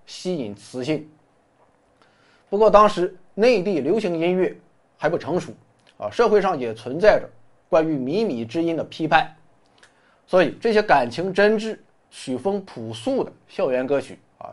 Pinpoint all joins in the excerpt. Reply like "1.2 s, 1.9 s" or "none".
none

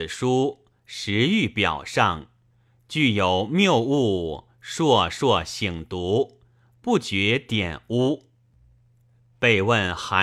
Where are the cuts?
none

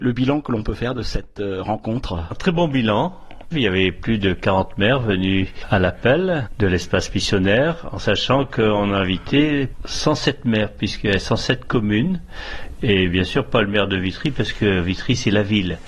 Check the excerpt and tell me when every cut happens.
3.5 s

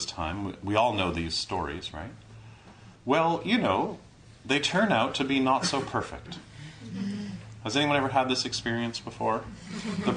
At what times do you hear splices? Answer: 3.0 s

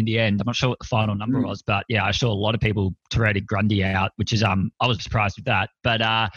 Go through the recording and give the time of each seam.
5.0 s

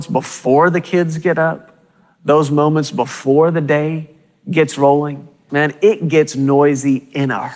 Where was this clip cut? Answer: 5.5 s

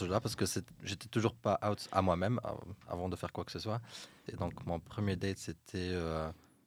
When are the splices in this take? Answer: 2.4 s, 4.3 s

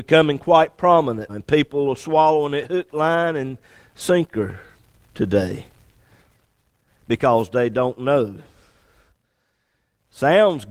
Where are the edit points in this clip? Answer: 1.3 s

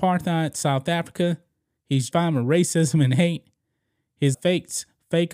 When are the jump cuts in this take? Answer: 2.1 s, 4.3 s

